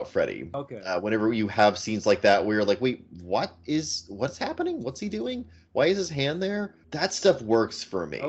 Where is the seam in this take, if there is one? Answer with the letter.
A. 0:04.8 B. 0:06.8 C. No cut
B